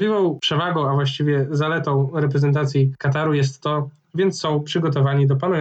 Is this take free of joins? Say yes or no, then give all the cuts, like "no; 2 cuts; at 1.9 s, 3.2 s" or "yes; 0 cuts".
no; 1 cut; at 4.0 s